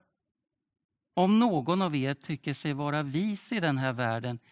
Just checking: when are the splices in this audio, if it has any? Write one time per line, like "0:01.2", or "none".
0:01.1